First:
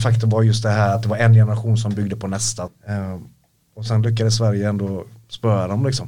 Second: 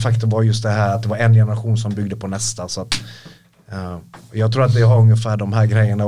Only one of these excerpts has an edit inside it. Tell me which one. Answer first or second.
first